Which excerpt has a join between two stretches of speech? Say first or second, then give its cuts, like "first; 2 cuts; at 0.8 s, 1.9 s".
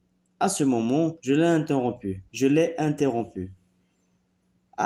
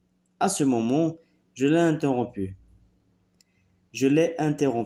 first; 2 cuts; at 1.2 s, 2.3 s